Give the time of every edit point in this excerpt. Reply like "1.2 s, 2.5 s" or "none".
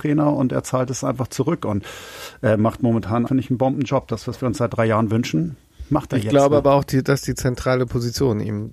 3.3 s